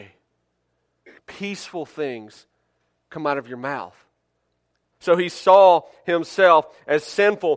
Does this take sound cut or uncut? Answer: cut